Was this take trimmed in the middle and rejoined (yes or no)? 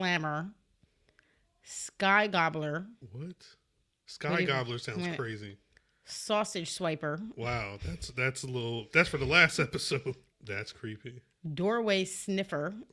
yes